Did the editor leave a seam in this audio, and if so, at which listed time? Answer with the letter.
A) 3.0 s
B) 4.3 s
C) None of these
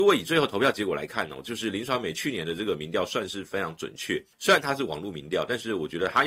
B